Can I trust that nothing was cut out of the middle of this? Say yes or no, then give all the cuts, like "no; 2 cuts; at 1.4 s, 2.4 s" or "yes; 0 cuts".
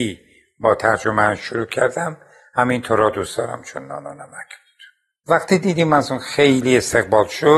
yes; 0 cuts